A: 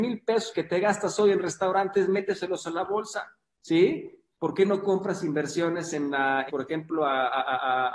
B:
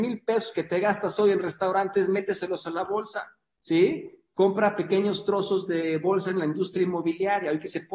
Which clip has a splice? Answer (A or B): A